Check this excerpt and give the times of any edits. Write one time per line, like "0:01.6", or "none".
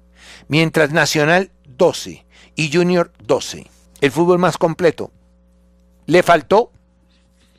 0:03.9